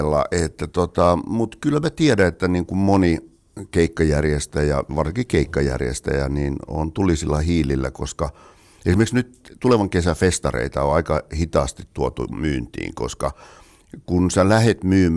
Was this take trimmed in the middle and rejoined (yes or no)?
yes